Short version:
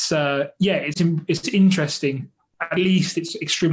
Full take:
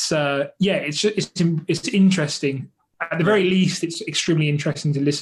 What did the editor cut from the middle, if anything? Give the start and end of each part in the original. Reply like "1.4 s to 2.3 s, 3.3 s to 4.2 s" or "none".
0.9 s to 1.3 s, 3.2 s to 3.4 s